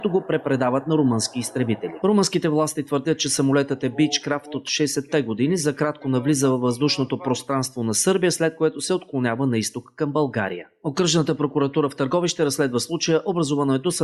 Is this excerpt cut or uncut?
uncut